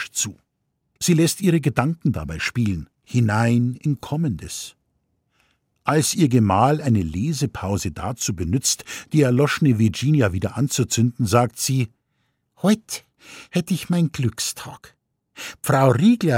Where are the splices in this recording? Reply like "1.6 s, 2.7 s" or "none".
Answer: 1.0 s, 3.0 s